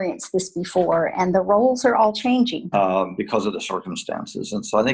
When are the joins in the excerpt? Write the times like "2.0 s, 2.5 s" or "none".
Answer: 2.7 s